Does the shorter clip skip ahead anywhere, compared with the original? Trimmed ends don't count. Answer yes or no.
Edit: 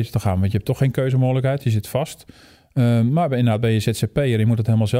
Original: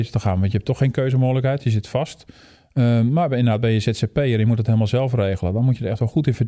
no